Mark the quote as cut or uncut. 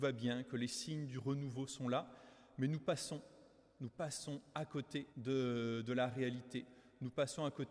cut